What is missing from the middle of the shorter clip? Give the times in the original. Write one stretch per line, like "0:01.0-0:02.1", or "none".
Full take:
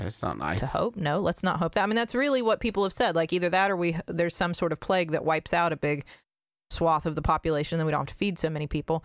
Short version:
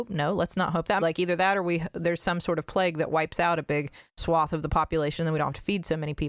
0:01.9-0:03.1
0:06.2-0:06.6